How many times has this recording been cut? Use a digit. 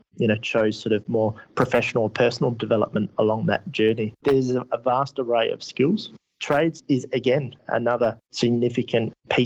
2